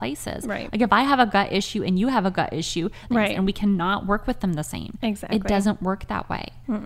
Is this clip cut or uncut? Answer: cut